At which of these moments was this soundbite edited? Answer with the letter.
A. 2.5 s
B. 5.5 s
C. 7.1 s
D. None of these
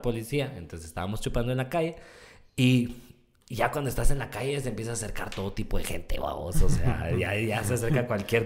D